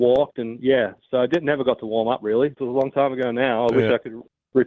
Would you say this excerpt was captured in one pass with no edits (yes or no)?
no